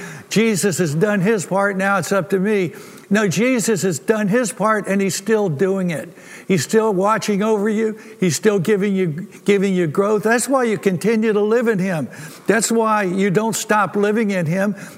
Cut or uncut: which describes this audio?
cut